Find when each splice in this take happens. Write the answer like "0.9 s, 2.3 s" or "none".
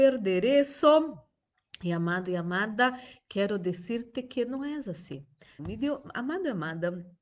5.6 s